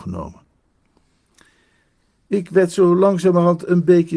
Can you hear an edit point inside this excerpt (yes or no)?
no